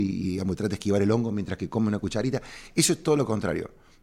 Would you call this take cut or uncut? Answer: uncut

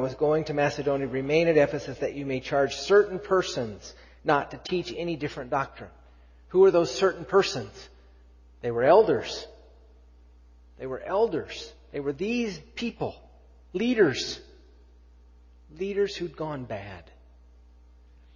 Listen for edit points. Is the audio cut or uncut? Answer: uncut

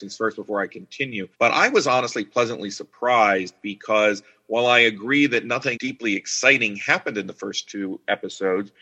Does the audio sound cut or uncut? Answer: cut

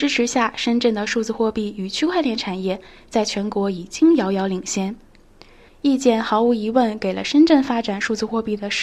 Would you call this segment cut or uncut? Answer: cut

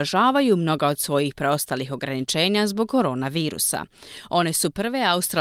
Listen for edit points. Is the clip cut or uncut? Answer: uncut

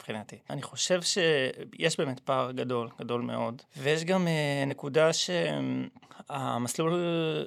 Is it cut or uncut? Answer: uncut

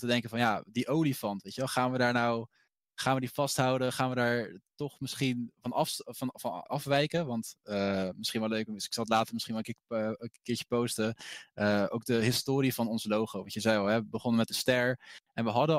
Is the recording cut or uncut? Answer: cut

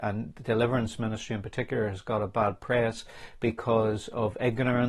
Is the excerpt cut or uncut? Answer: uncut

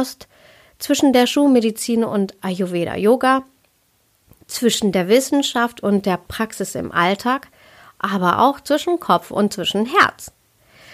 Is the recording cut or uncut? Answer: uncut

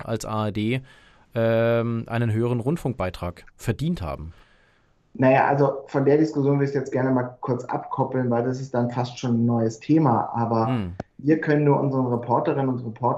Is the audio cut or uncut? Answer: uncut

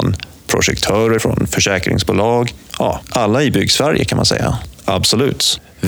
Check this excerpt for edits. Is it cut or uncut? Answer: cut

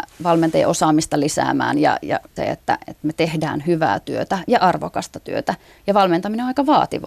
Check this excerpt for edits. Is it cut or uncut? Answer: cut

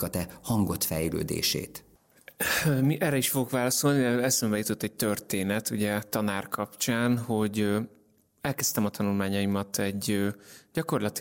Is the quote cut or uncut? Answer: uncut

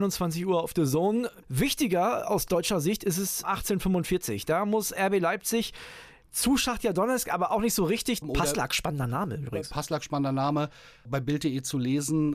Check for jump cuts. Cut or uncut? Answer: cut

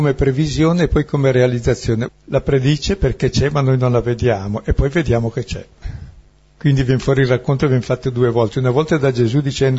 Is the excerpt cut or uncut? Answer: cut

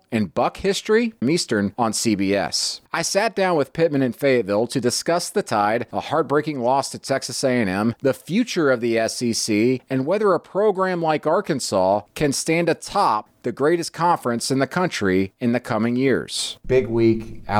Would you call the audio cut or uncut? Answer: cut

